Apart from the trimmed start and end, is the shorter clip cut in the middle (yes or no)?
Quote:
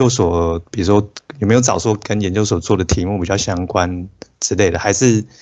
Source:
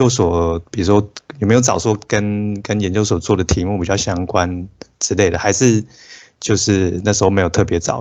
yes